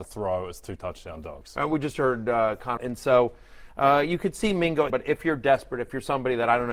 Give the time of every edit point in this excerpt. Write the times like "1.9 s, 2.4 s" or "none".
2.8 s, 4.9 s